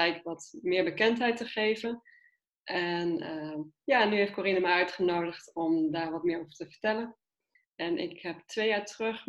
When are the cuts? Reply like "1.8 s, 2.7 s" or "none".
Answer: 7.6 s